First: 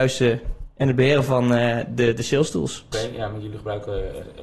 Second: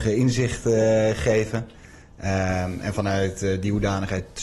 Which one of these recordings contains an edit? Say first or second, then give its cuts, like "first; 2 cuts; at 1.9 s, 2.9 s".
first; 1 cut; at 2.9 s